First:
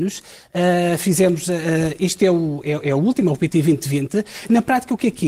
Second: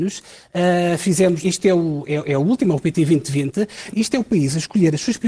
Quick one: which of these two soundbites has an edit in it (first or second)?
second